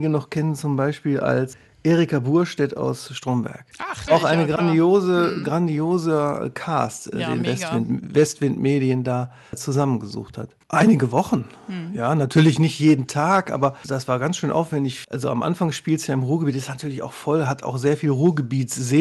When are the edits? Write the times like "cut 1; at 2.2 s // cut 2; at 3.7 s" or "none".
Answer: cut 1; at 4.1 s // cut 2; at 10.6 s